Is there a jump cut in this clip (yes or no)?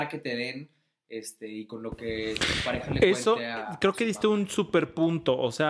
no